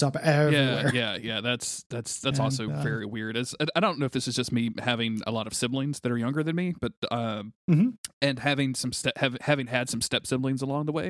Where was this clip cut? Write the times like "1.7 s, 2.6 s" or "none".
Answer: 7.6 s